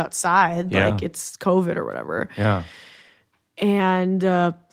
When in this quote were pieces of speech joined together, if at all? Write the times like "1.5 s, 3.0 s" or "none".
none